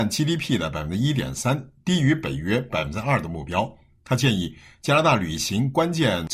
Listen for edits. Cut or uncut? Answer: uncut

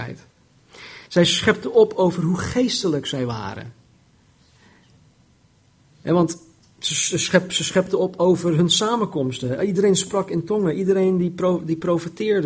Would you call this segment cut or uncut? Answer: uncut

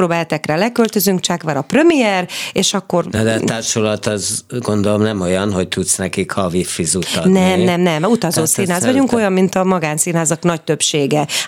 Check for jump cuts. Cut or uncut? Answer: uncut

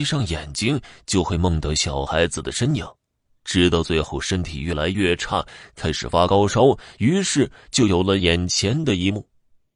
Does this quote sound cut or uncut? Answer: uncut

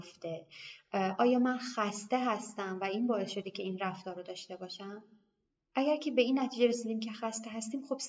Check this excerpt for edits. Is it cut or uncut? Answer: uncut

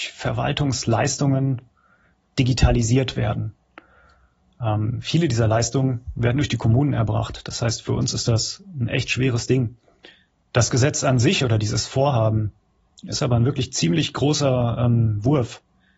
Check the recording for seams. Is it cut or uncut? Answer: uncut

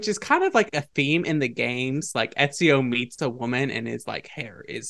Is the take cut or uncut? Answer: uncut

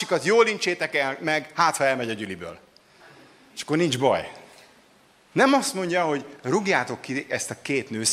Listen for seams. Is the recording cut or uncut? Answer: cut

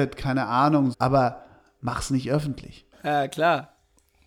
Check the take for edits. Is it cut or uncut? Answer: cut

